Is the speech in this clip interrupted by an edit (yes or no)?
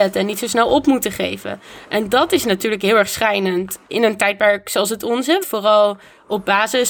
yes